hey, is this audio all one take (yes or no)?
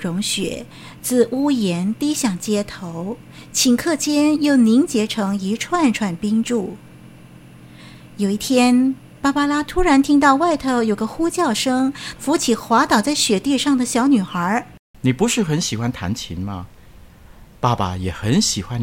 no